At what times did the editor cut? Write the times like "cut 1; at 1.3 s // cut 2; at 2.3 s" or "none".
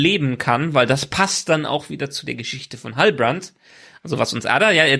none